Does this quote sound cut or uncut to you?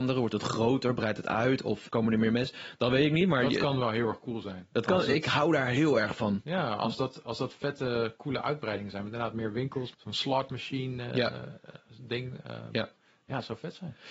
cut